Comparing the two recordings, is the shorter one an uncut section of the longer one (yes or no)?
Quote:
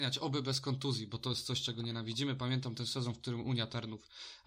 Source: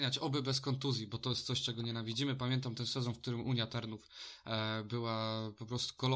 yes